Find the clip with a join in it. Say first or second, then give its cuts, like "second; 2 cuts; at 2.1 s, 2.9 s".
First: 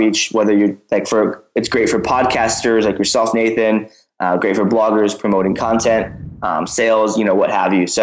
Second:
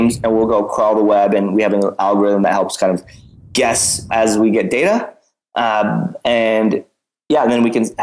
second; 1 cut; at 4.1 s